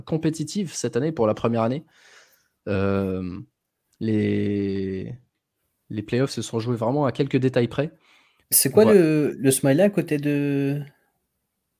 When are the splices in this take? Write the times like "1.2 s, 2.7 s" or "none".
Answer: 8.4 s